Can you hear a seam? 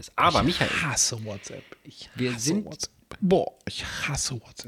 yes; 1 cut; at 3.2 s

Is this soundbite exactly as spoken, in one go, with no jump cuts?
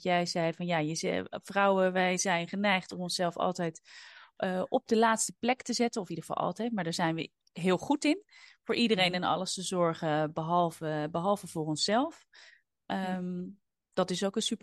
yes; 0 cuts

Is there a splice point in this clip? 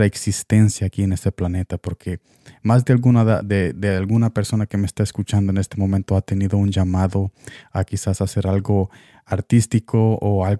no; 0 cuts

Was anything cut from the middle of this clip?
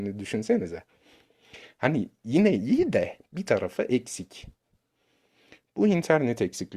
no; 0 cuts

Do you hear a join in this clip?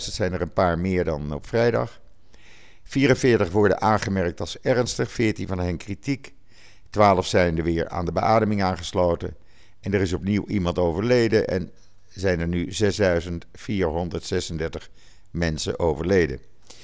no; 0 cuts

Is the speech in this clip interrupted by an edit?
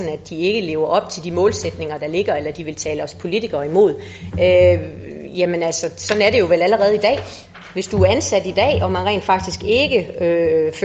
no; 0 cuts

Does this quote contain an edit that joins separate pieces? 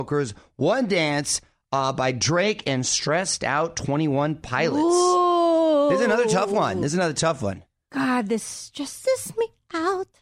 no; 0 cuts

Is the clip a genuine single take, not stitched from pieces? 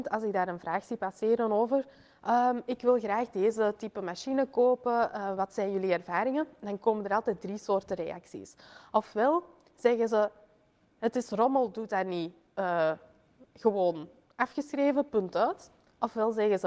yes; 0 cuts

